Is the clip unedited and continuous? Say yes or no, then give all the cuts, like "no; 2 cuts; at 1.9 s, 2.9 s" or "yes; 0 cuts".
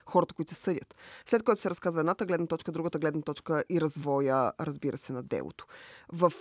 yes; 0 cuts